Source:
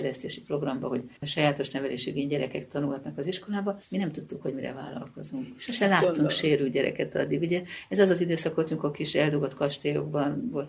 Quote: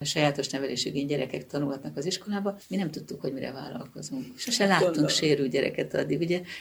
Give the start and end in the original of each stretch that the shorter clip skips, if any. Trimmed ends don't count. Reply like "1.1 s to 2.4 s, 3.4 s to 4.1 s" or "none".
none